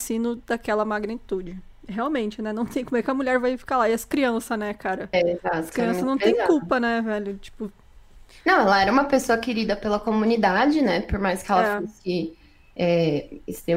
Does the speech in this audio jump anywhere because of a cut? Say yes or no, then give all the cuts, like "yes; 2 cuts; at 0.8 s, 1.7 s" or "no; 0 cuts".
no; 0 cuts